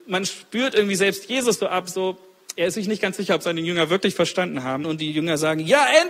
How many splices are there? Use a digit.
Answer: 1